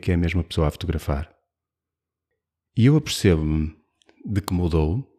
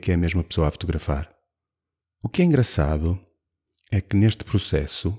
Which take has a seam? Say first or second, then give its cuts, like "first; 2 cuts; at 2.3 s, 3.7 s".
second; 1 cut; at 2.0 s